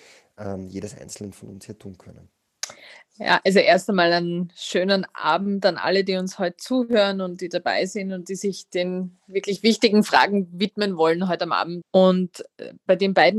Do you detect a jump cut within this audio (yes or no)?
yes